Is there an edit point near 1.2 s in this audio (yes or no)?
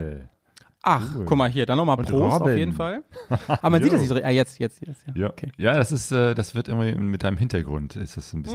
no